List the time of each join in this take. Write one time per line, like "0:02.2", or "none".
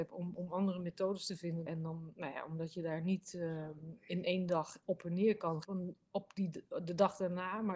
0:01.7
0:05.6